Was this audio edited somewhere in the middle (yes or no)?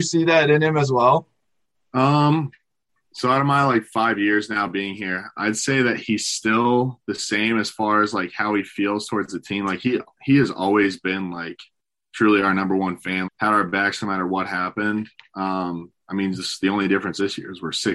yes